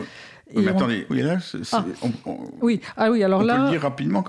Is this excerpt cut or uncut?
cut